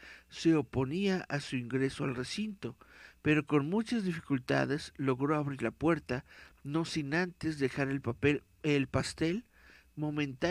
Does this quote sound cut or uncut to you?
uncut